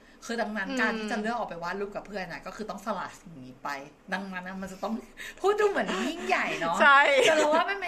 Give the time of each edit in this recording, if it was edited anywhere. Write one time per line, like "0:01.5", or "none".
0:04.0